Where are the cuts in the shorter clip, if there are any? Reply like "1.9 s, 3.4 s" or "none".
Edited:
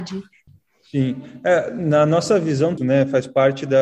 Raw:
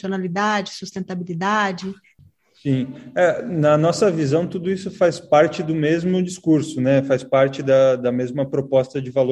2.8 s